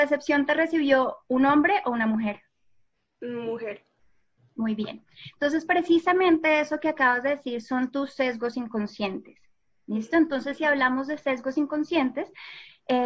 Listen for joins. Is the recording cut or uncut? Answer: uncut